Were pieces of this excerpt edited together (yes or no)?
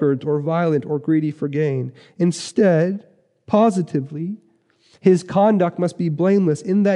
no